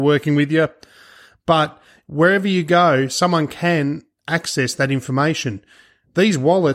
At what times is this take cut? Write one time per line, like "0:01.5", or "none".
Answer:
none